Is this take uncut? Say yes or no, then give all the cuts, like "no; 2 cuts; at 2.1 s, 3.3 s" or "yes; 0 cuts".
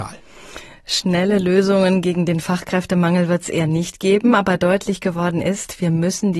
yes; 0 cuts